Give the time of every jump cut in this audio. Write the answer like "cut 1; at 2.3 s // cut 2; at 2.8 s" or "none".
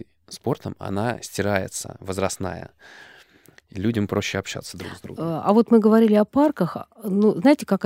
none